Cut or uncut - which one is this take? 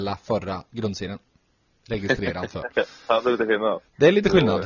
uncut